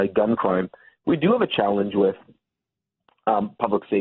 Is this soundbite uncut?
yes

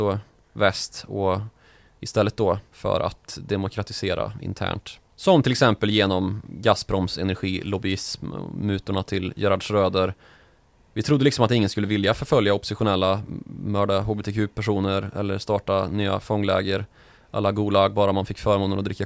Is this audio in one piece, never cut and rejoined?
yes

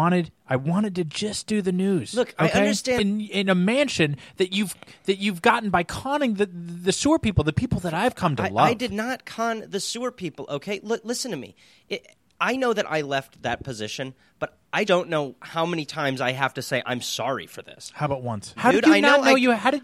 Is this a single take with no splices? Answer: no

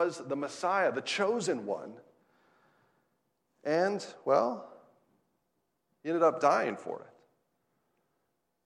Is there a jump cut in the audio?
no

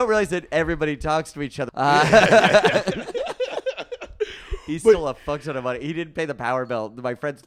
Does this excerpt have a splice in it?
yes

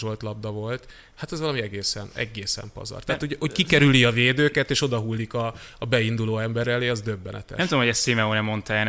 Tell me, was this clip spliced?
no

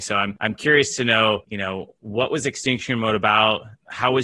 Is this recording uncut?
yes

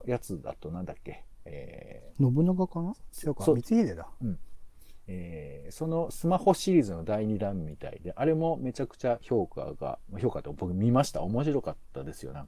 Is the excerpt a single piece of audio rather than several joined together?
yes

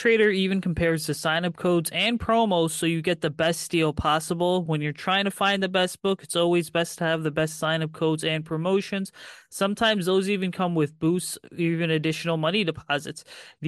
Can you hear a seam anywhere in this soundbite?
no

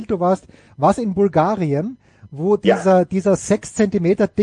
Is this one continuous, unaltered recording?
yes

